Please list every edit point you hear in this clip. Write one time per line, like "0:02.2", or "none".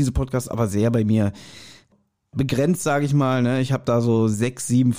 none